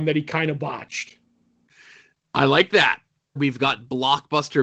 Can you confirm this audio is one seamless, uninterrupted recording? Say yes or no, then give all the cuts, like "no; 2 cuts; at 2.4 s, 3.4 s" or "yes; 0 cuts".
no; 1 cut; at 3.4 s